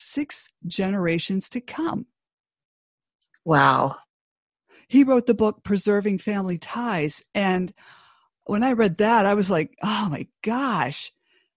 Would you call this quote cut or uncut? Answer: uncut